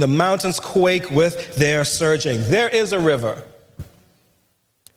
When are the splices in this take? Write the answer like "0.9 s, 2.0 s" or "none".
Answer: none

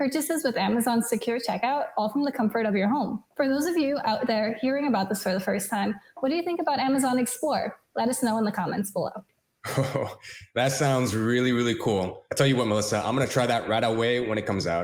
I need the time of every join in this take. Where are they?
none

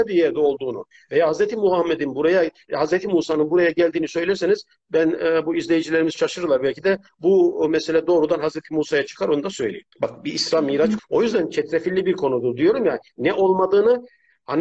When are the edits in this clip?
9.9 s, 11.0 s

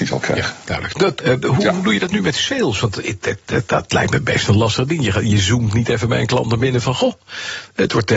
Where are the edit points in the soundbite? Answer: 1.2 s

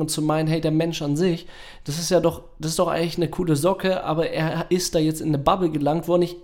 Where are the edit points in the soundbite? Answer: none

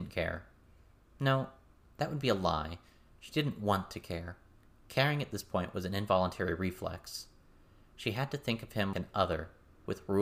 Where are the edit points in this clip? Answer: 8.9 s

